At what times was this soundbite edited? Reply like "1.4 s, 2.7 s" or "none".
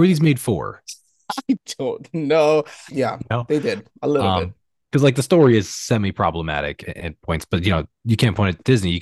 2.9 s, 6.8 s